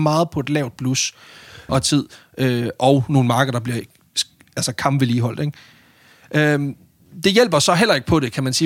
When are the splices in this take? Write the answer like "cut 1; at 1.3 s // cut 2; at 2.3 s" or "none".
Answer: cut 1; at 1.7 s